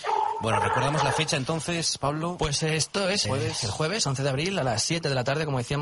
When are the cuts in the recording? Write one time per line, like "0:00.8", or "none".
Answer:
0:03.2